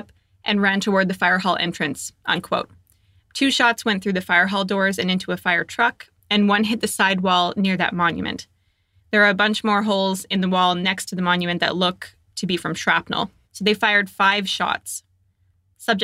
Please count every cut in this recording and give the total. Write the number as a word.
two